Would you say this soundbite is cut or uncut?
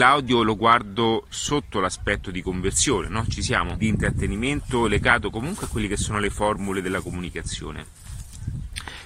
cut